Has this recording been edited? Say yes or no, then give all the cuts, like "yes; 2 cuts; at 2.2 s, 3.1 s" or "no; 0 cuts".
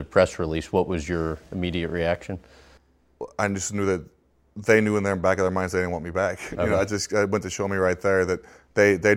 no; 0 cuts